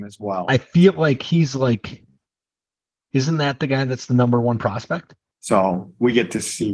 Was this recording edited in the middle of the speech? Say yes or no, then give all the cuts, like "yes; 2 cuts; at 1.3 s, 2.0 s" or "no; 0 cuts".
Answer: yes; 1 cut; at 5.3 s